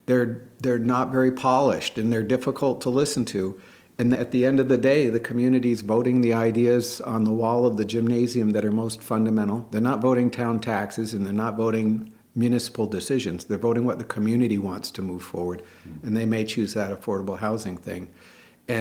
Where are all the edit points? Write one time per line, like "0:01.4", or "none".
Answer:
0:04.1